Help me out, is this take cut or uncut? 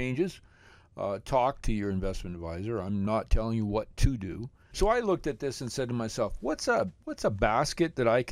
cut